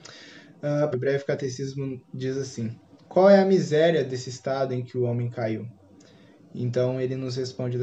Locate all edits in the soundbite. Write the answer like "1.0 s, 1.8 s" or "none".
0.9 s